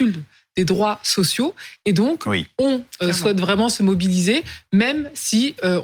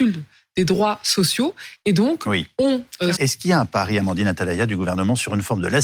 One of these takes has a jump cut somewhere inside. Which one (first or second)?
second